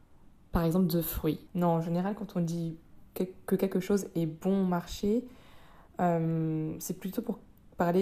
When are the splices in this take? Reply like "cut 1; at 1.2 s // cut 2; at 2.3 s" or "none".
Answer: cut 1; at 1.5 s